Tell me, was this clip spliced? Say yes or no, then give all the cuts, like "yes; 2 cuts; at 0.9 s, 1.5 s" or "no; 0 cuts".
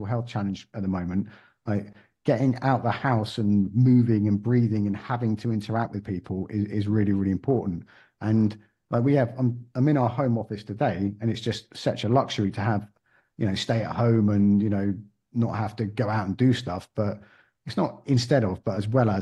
no; 0 cuts